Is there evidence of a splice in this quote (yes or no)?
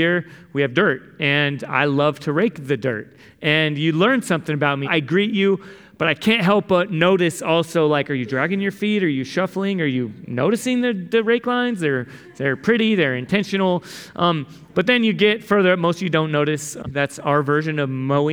yes